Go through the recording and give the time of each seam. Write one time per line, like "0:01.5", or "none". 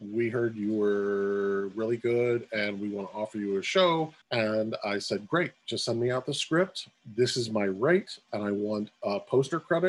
0:04.2